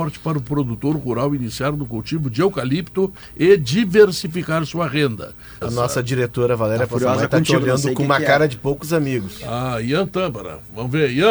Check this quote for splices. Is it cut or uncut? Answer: cut